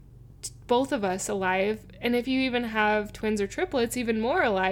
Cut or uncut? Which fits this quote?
uncut